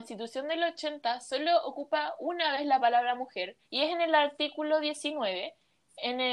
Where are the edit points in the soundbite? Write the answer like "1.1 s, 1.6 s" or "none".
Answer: 3.6 s